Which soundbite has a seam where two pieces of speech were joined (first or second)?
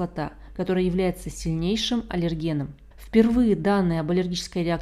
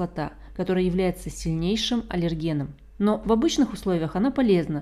first